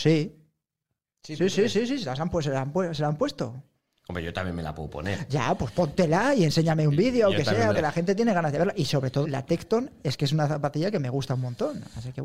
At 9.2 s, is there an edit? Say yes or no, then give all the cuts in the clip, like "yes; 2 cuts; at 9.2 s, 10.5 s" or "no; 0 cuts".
yes; 2 cuts; at 7.7 s, 9.2 s